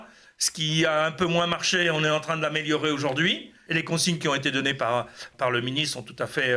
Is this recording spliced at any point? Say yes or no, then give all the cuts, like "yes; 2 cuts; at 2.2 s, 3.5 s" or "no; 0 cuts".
yes; 2 cuts; at 3.7 s, 5.3 s